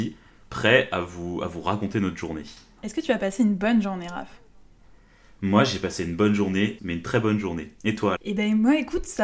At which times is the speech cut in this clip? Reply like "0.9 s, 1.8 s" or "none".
2.8 s, 6.8 s, 8.1 s

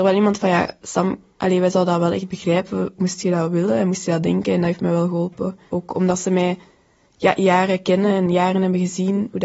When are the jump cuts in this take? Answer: 5.7 s

